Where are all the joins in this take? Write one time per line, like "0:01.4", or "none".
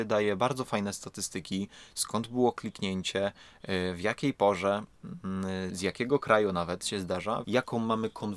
0:05.7
0:07.4